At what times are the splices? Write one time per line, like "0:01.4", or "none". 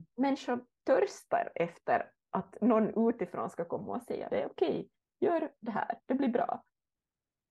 0:04.3